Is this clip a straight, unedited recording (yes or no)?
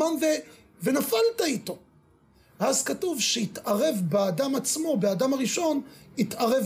yes